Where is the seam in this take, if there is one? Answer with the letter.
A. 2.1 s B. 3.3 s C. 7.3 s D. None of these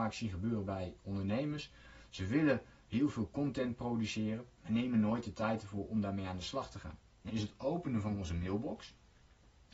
C